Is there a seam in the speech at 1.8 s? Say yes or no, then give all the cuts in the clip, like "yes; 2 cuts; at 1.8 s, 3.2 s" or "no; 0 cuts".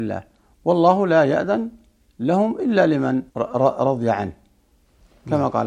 no; 1 cut; at 3.3 s